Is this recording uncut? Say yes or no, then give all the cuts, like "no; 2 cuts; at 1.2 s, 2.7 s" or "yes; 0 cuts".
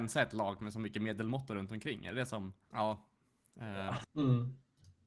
no; 2 cuts; at 2.7 s, 4.0 s